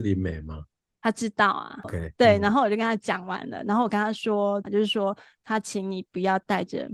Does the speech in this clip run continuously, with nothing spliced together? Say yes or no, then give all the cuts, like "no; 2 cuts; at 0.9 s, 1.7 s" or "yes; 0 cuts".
no; 2 cuts; at 1.8 s, 4.6 s